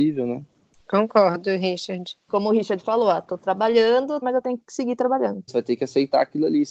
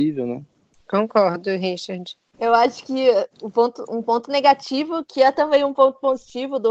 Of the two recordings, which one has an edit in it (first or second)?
first